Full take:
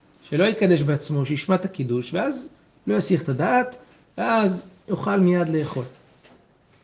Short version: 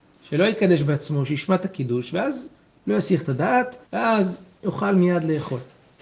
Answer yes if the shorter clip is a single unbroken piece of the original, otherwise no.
no